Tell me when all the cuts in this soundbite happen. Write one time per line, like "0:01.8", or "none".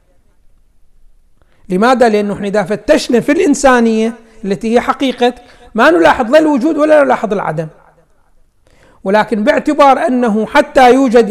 none